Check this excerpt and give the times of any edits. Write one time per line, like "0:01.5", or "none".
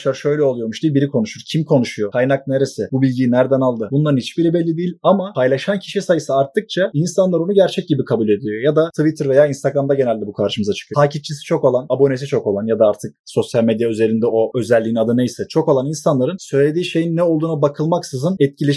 0:10.9